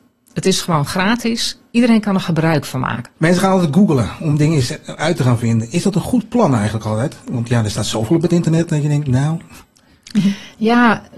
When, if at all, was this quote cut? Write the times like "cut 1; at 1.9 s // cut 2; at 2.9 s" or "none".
cut 1; at 3.1 s